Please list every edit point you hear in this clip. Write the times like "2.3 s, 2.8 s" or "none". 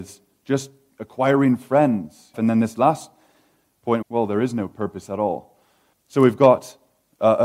2.3 s, 4.0 s, 5.9 s